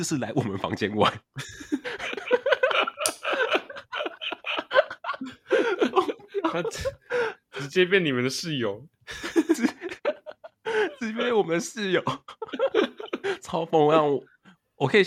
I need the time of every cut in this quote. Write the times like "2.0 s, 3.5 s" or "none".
none